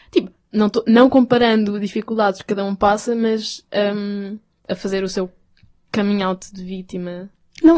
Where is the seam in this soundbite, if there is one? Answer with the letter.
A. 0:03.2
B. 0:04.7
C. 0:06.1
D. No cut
B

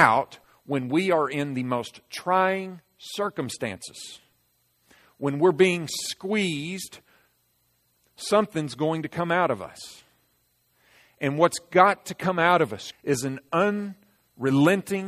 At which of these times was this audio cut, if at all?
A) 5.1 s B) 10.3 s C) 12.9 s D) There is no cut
C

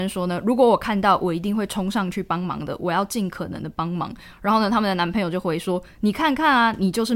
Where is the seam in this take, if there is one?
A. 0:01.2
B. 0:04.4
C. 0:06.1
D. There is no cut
D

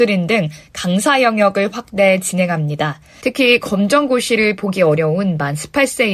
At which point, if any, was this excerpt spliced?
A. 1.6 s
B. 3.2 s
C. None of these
B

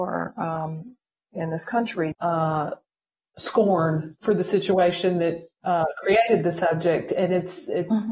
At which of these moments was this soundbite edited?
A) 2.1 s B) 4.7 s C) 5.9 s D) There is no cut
A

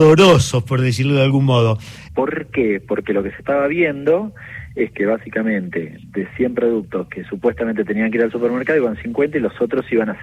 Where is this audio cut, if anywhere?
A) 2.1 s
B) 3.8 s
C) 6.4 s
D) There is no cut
A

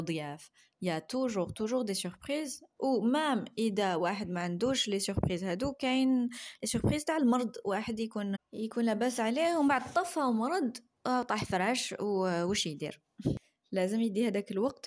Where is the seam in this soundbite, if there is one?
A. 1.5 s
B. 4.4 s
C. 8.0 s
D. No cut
A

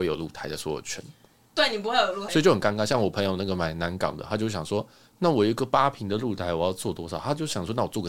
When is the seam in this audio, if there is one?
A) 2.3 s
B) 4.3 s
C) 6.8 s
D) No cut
A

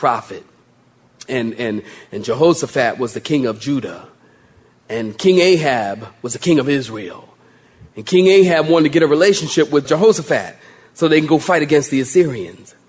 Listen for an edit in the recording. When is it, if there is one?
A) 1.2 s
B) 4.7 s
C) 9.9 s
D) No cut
C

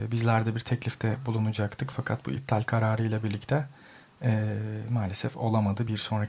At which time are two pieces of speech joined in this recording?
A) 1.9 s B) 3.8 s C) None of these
C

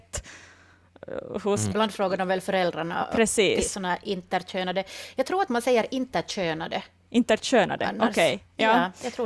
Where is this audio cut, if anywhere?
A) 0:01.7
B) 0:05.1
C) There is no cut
A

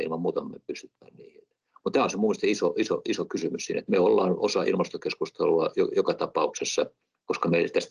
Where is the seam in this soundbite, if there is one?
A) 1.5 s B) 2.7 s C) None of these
C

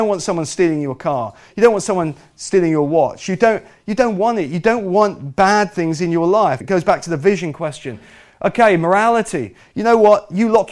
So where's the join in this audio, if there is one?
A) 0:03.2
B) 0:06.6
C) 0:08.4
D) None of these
B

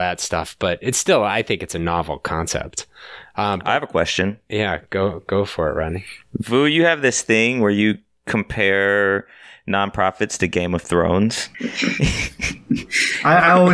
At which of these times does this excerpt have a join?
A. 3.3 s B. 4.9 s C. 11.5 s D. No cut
C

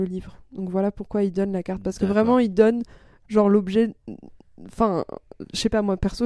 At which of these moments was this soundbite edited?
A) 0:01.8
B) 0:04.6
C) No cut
C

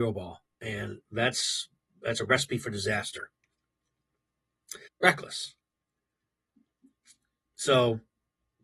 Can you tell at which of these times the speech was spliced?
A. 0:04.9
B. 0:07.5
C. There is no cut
A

